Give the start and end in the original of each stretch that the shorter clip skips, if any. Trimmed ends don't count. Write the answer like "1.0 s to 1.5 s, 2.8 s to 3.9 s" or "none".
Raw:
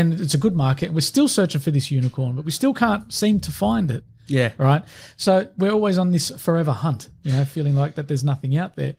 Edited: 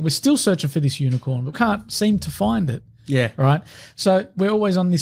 2.4 s to 2.7 s

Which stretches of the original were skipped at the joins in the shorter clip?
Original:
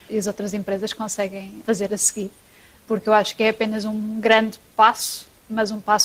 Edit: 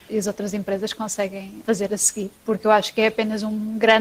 2.4 s to 2.8 s

